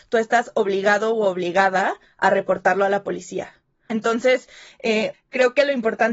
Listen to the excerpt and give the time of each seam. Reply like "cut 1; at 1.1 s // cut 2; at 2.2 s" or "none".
cut 1; at 3.9 s // cut 2; at 5.1 s